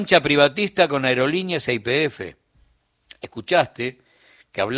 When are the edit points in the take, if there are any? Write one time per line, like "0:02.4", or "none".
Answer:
none